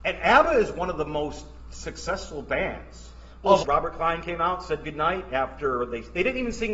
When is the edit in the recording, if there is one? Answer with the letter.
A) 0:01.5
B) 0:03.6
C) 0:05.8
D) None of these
B